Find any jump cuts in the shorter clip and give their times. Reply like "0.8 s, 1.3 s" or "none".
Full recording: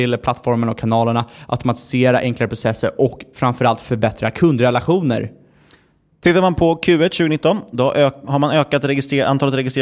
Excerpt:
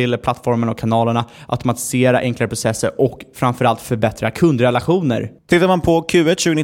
5.4 s